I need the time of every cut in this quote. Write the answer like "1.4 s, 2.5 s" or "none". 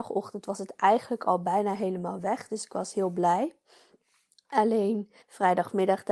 5.2 s